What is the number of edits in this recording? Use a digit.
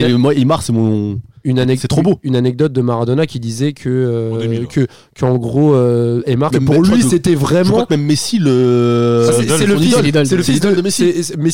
1